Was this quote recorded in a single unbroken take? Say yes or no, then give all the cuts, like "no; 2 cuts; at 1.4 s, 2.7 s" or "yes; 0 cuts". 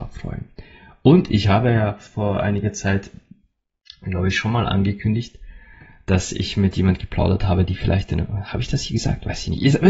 yes; 0 cuts